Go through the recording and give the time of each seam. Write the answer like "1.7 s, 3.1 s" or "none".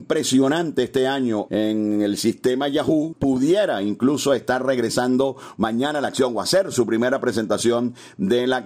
1.5 s, 3.1 s